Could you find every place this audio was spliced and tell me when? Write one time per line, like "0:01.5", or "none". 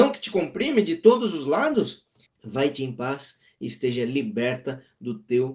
0:02.3